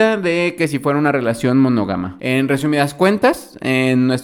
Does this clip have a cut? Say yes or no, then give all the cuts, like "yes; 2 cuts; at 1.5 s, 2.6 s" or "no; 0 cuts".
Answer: yes; 1 cut; at 2.2 s